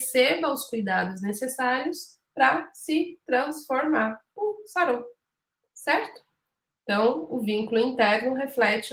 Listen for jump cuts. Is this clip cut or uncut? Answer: uncut